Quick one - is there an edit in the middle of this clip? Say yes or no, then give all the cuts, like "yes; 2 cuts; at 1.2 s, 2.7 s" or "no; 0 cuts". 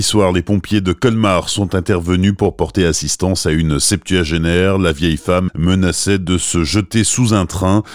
yes; 1 cut; at 5.5 s